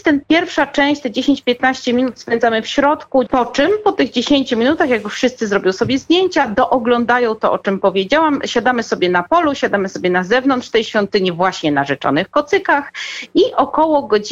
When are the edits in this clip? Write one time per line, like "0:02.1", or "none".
0:03.3